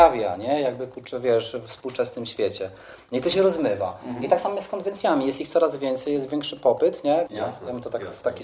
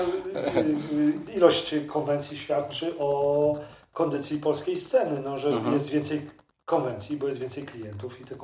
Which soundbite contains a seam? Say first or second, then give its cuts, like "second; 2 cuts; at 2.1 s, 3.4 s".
first; 1 cut; at 7.3 s